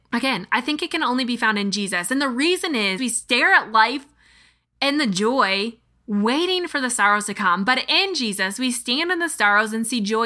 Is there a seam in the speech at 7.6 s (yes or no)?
no